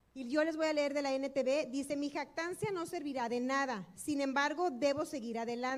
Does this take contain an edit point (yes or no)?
no